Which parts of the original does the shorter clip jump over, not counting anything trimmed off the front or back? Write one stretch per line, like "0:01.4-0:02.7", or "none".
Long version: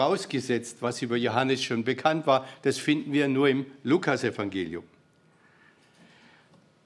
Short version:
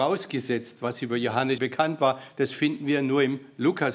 0:01.6-0:01.8